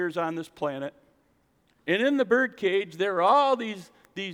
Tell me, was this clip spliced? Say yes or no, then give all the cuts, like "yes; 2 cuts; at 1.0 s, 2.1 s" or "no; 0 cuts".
yes; 1 cut; at 1.8 s